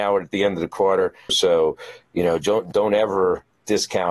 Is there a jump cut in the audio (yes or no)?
yes